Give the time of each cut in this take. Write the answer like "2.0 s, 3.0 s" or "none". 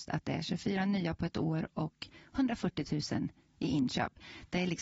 none